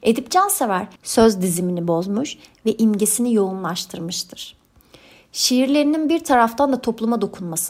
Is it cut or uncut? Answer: cut